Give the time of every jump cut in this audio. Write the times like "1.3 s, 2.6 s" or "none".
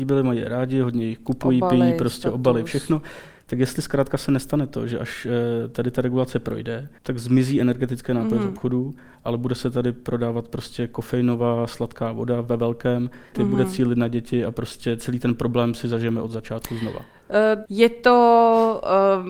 7.0 s, 13.3 s, 17.7 s